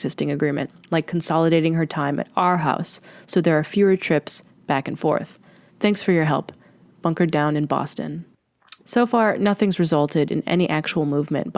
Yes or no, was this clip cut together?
yes